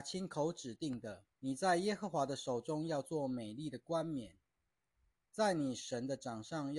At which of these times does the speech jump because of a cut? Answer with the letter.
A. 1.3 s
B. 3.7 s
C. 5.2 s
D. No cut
A